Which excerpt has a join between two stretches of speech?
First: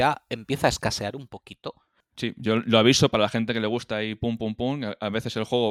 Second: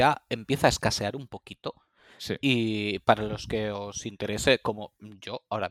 first; 1 cut; at 2.0 s

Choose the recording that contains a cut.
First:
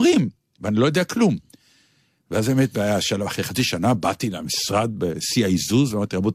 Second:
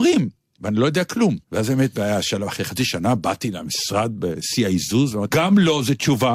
second; 2 cuts; at 1.4 s, 5.3 s

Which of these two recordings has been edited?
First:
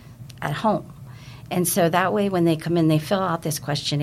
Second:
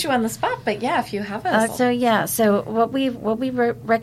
second; 1 cut; at 1.7 s

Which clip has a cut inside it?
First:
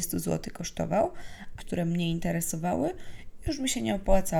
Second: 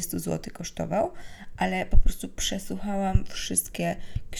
first; 1 cut; at 1.6 s

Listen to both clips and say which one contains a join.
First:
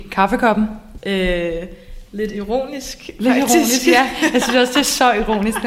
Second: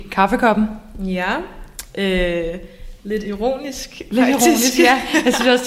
first; 1 cut; at 1.0 s

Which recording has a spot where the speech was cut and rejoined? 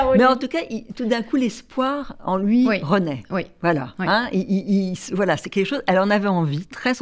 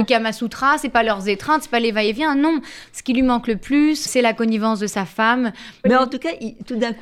second; 2 cuts; at 4.1 s, 5.8 s

